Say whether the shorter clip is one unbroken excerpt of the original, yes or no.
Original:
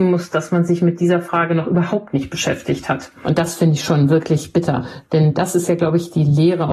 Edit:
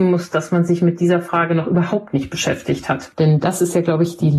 no